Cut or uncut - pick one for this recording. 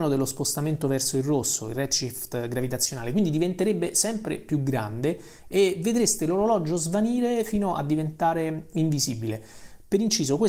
uncut